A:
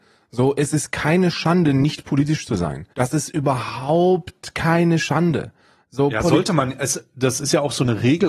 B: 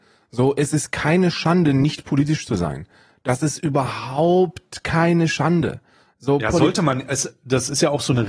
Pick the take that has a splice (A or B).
A